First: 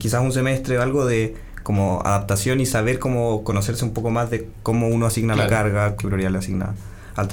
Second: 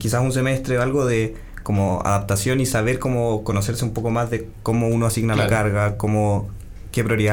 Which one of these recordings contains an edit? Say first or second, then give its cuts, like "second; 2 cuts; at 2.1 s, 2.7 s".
first; 1 cut; at 6.0 s